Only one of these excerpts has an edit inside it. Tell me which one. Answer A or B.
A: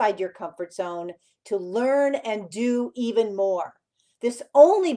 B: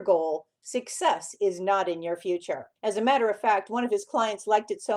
B